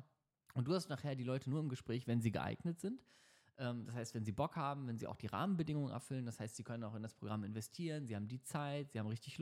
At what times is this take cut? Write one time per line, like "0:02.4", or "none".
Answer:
none

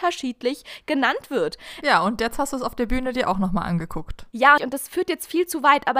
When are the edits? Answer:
0:01.8
0:04.6

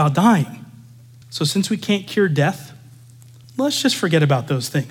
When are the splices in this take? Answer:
0:01.2
0:03.4

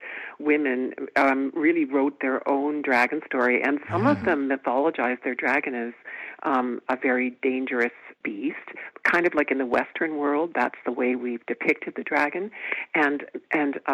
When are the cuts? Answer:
0:08.2

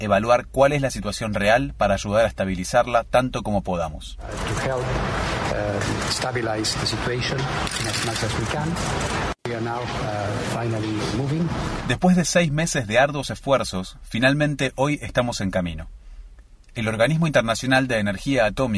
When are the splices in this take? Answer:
0:09.4

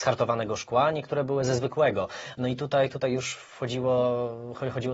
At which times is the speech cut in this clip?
none

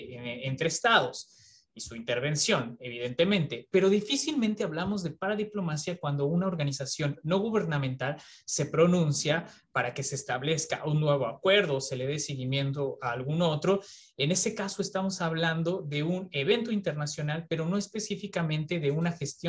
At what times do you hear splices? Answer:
none

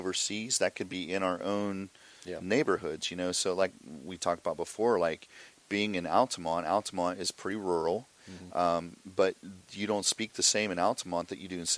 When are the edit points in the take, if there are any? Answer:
none

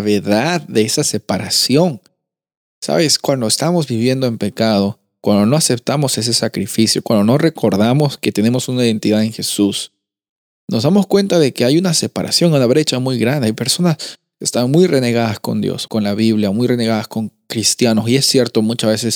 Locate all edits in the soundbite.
0:15.9

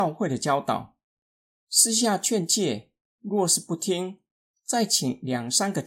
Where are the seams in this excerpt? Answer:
none

